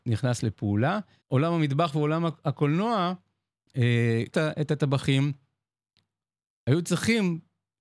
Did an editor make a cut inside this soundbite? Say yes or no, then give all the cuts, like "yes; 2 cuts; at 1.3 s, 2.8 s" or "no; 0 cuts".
yes; 2 cuts; at 1.2 s, 4.3 s